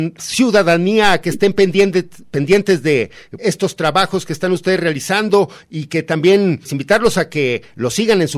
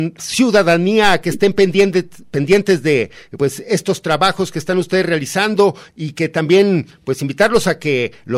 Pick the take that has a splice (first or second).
first